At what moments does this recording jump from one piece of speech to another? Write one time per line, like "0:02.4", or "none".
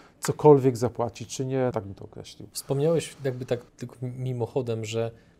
0:01.7
0:03.7